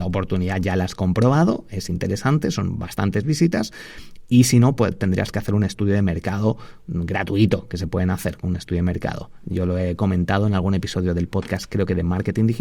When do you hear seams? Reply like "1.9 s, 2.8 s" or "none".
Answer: none